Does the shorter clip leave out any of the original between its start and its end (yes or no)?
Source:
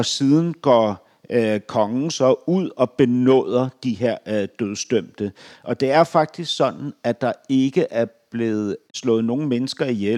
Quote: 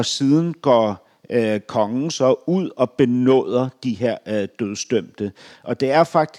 no